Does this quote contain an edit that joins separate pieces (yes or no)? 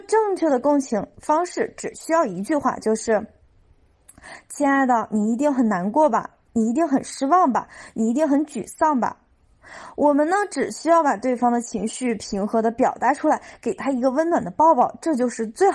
no